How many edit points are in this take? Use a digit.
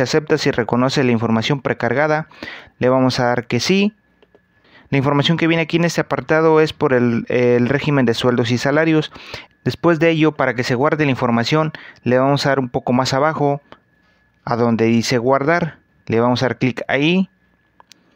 2